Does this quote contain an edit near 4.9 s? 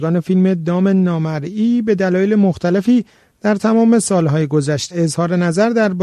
yes; 1 cut; at 4.9 s

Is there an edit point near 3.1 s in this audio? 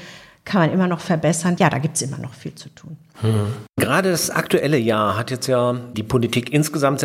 no; 1 cut; at 1.6 s

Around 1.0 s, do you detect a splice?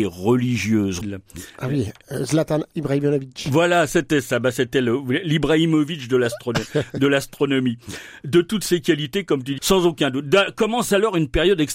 yes; 2 cuts; at 1.0 s, 9.6 s

